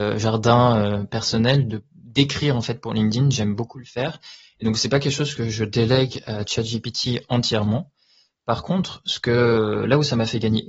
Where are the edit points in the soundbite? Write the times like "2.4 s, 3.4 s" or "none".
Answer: none